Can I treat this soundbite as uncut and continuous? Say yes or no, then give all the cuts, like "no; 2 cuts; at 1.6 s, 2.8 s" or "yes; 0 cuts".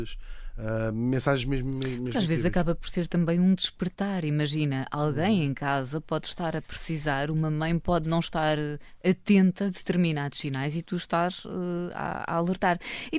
yes; 0 cuts